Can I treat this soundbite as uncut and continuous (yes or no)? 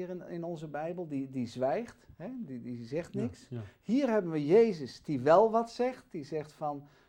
yes